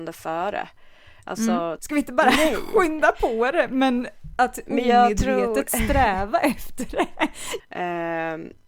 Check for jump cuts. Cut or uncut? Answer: cut